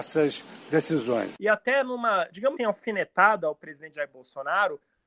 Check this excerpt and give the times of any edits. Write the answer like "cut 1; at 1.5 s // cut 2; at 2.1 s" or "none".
cut 1; at 2.6 s